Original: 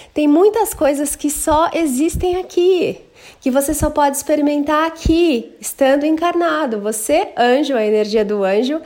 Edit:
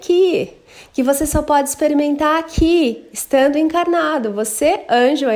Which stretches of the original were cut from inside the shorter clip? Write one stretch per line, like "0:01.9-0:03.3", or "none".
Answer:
none